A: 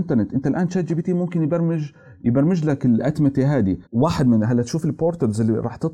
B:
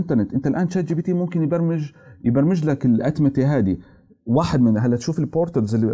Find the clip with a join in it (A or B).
A